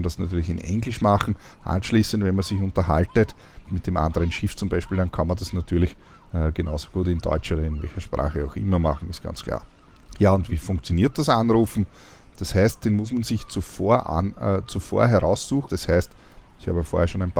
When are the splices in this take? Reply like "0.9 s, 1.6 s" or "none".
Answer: 3.6 s, 12.3 s, 15.7 s